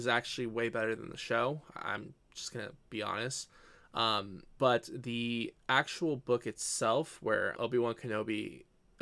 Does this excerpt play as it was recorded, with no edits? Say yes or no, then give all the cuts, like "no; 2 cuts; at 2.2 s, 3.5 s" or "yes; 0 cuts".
no; 2 cuts; at 4.6 s, 7.5 s